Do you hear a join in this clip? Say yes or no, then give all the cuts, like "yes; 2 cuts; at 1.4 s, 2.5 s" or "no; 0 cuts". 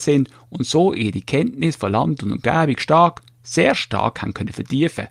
no; 0 cuts